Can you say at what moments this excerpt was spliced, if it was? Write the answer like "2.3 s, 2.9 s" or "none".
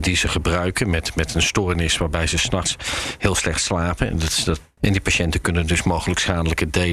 4.8 s